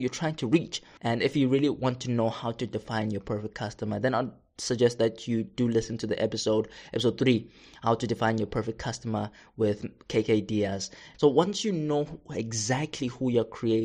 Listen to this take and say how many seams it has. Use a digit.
2